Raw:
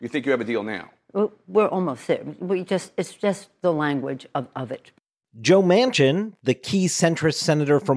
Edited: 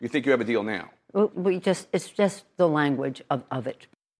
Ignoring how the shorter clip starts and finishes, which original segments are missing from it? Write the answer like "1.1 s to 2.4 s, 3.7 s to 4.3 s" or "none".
1.3 s to 2.4 s